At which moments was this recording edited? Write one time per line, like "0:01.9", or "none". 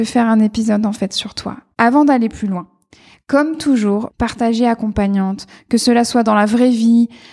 0:01.7
0:04.1